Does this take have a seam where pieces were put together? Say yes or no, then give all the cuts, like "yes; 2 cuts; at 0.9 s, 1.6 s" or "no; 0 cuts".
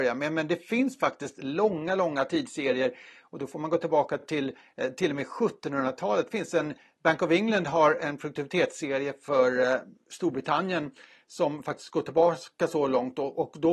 no; 0 cuts